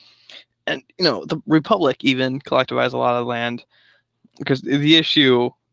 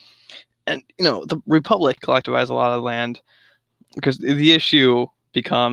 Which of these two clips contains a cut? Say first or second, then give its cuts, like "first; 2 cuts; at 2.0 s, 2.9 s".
second; 1 cut; at 2.0 s